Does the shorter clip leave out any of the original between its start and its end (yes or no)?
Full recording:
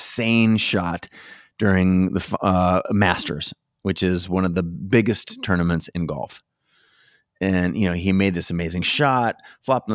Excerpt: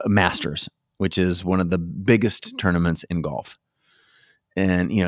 no